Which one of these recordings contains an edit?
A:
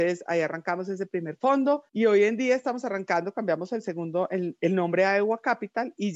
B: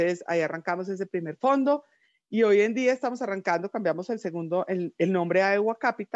A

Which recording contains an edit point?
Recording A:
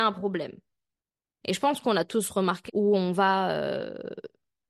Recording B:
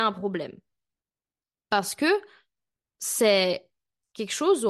A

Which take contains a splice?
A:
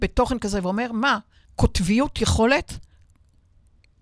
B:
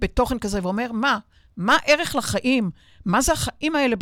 A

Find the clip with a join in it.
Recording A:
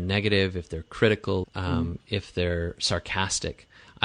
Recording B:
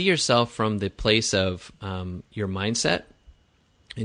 A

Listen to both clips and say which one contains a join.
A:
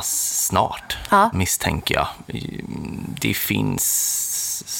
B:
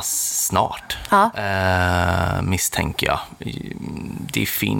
A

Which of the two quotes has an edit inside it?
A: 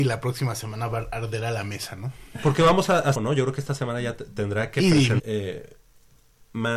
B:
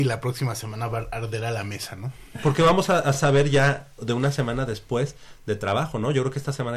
A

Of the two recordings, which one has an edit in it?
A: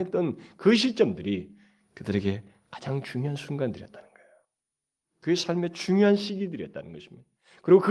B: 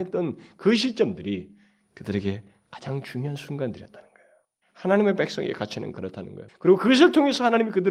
B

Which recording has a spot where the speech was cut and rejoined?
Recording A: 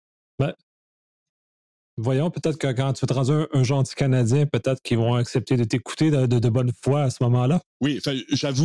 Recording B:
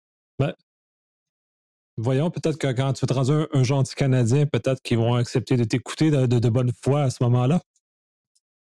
A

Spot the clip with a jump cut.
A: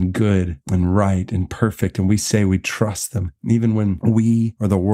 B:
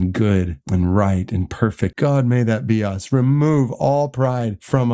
B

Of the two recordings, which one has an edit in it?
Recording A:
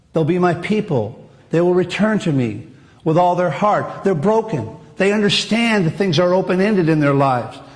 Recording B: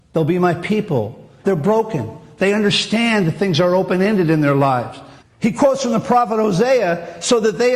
B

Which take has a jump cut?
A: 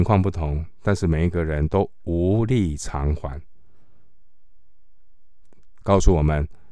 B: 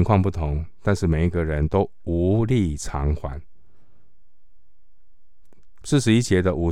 B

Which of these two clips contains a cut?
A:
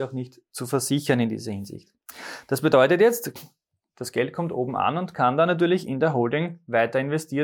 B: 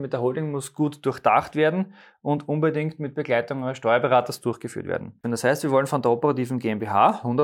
B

